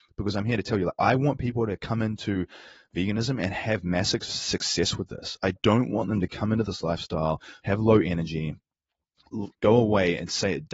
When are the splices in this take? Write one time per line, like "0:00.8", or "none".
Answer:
0:07.6
0:09.5